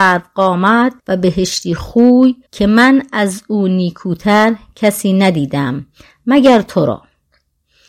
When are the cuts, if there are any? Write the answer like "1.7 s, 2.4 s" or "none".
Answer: 1.0 s, 2.4 s